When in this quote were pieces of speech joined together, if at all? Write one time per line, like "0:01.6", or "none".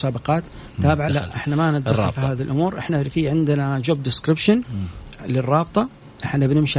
0:01.1